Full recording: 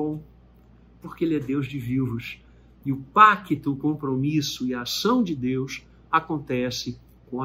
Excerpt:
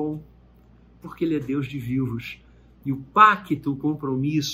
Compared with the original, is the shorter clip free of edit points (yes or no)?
yes